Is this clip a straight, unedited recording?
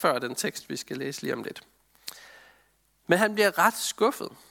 yes; 0 cuts

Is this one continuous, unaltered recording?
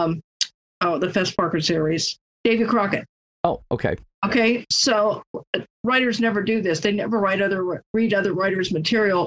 yes; 0 cuts

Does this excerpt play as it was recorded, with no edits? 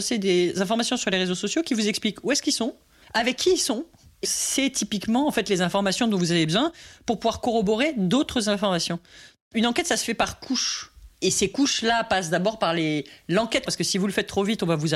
no; 2 cuts; at 4.2 s, 13.7 s

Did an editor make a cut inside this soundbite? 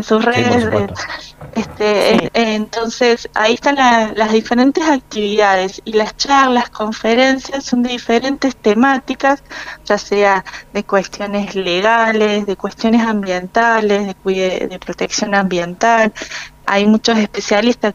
yes; 3 cuts; at 2.3 s, 3.3 s, 16.6 s

